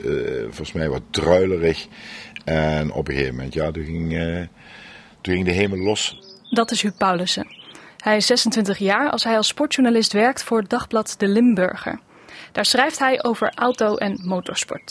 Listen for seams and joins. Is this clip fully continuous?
yes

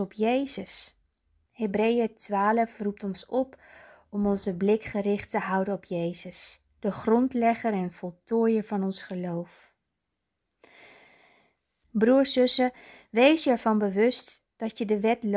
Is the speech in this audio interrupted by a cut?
yes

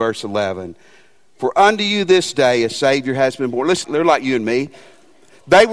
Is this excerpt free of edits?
no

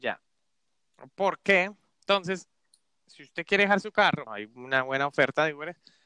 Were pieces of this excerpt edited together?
yes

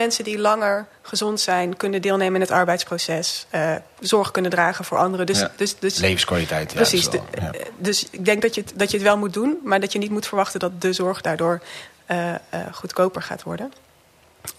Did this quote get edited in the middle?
no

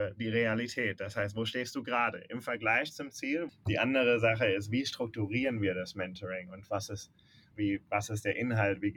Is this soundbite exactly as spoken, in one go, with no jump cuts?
no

